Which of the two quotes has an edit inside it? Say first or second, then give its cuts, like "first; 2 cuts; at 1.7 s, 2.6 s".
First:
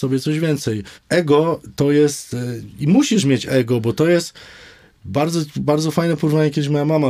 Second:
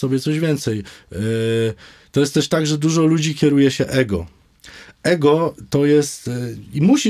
first; 1 cut; at 1.0 s